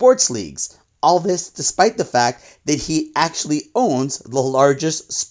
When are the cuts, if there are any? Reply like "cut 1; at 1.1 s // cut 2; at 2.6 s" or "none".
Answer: none